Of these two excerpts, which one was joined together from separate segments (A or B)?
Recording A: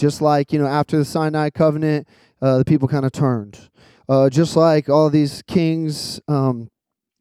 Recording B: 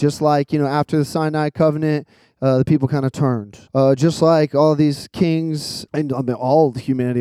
B